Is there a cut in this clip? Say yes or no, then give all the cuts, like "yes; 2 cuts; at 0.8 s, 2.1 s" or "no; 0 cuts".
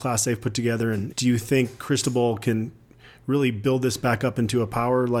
yes; 1 cut; at 1.1 s